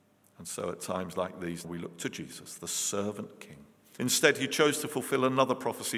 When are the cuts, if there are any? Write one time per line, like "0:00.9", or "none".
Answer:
0:01.6
0:04.0